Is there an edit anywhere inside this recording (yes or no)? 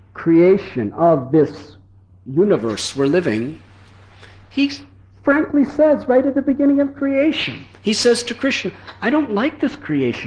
no